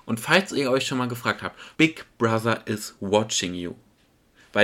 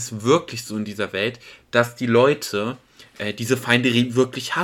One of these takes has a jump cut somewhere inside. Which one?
first; 1 cut; at 1.7 s

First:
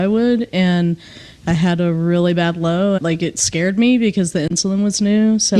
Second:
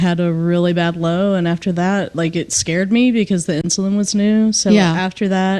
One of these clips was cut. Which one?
first; 1 cut; at 3.0 s

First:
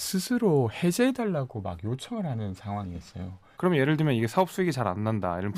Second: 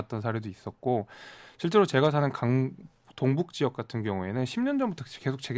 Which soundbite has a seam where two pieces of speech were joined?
first; 1 cut; at 3.5 s

